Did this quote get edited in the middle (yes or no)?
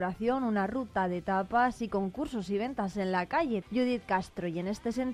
yes